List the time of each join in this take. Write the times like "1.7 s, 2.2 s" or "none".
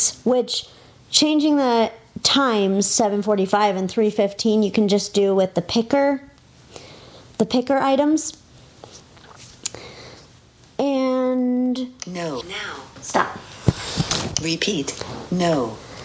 12.4 s

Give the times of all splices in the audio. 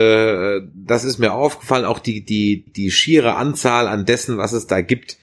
2.7 s

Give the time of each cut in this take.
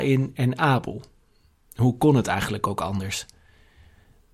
none

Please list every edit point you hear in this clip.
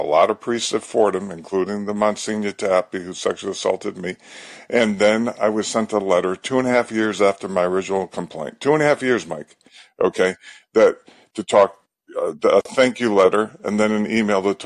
none

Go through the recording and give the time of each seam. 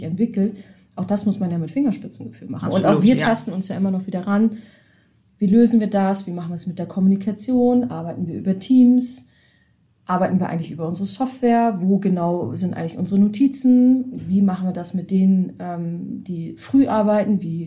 none

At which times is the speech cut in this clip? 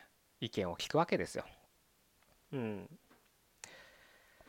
2.3 s

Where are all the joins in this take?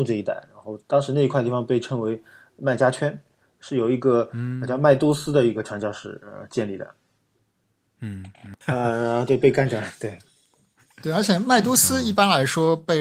8.6 s

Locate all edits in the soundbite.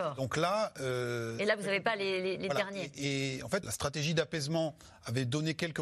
3.6 s

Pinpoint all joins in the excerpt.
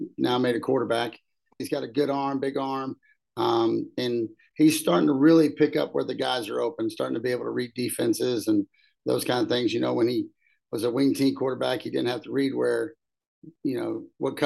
1.6 s

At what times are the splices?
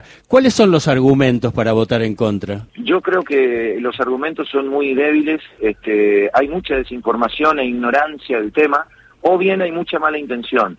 2.7 s

